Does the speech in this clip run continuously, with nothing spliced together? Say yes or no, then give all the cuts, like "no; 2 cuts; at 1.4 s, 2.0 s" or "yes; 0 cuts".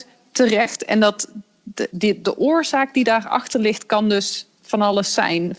yes; 0 cuts